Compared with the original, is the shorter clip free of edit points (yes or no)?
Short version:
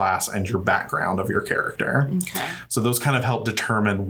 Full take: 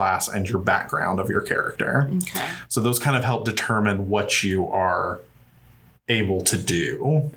yes